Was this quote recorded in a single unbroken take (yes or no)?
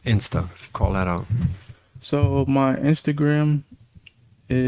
yes